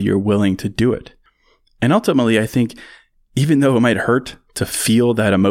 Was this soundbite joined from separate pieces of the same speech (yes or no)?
no